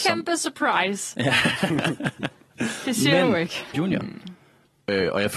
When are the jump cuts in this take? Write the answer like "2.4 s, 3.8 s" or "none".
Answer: 3.7 s